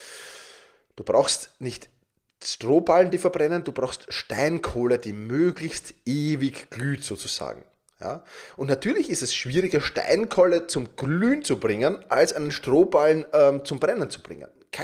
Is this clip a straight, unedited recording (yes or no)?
yes